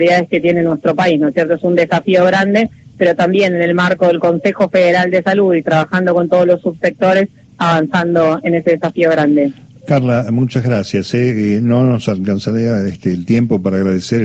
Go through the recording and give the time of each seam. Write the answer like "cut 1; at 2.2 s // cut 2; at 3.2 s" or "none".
none